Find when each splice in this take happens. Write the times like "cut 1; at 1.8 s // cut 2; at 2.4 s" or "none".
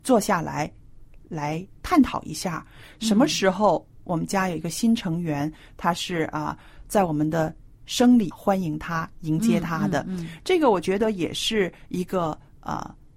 cut 1; at 8.3 s